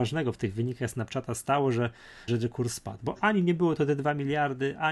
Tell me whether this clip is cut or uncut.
cut